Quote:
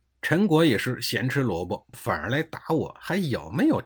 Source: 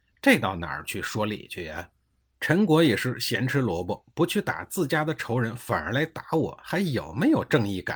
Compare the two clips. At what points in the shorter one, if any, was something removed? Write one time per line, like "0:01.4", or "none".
0:01.9